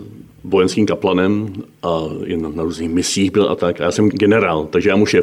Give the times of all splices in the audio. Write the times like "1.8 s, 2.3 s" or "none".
4.1 s